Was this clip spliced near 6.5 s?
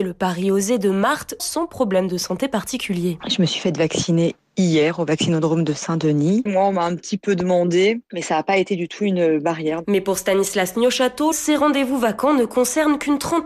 yes; 3 cuts; at 1.4 s, 6.5 s, 11.3 s

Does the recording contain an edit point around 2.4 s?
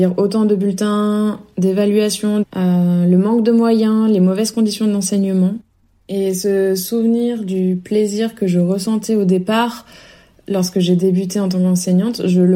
yes; 1 cut; at 2.4 s

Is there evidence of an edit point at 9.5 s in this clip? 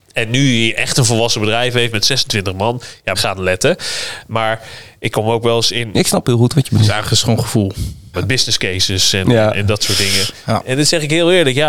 no; 3 cuts; at 3.1 s, 5.9 s, 8.1 s

